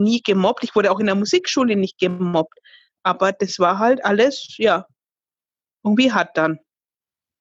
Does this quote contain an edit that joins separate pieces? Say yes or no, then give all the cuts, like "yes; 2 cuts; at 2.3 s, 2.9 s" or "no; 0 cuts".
no; 0 cuts